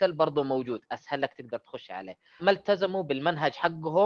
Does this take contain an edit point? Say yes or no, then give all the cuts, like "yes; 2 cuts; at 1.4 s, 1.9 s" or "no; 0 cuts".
yes; 1 cut; at 2.4 s